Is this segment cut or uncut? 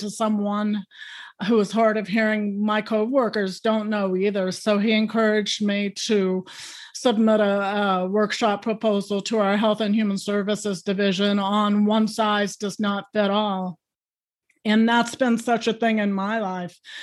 uncut